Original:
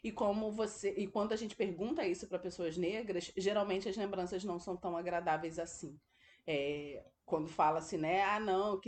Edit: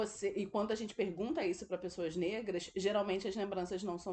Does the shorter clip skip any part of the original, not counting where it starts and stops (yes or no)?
no